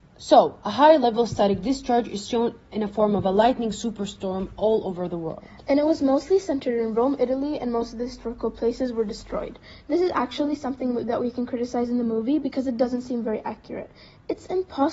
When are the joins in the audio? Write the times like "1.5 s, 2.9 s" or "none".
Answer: none

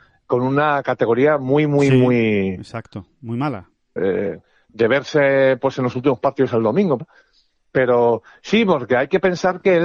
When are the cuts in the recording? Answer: 4.0 s, 7.0 s

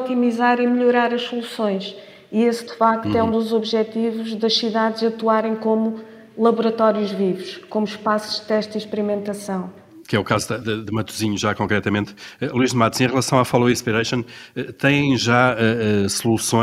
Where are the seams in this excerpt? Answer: none

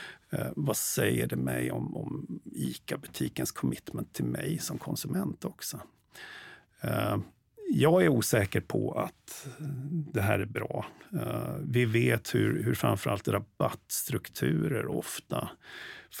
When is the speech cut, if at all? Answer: none

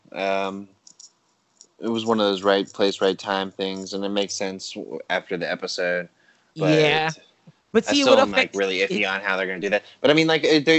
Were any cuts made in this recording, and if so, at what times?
6.5 s

